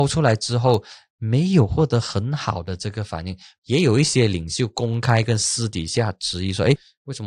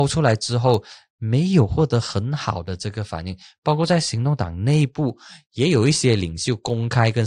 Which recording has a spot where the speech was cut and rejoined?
first; 1 cut; at 3.6 s

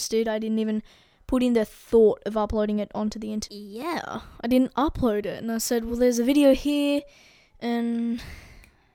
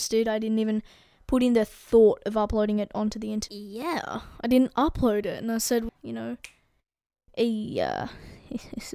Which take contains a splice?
second; 1 cut; at 5.9 s

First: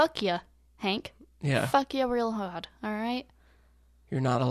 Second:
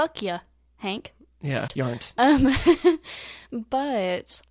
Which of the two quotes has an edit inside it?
second; 1 cut; at 1.7 s

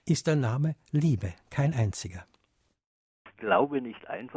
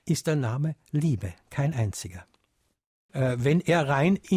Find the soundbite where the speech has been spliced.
second; 1 cut; at 3.1 s

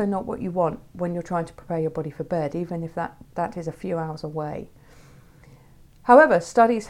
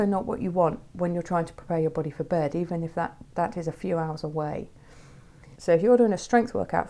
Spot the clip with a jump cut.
second; 1 cut; at 5.6 s

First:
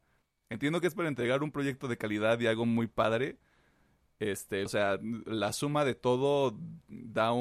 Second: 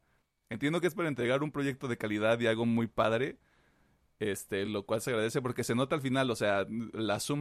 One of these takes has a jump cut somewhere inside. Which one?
first; 1 cut; at 4.7 s

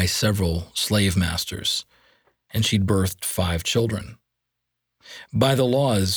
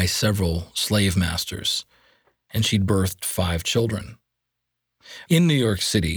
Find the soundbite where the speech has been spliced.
second; 1 cut; at 5.3 s

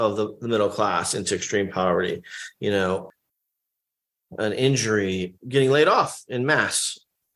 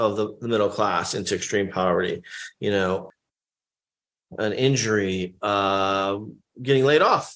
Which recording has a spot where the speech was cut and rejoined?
first; 1 cut; at 5.4 s

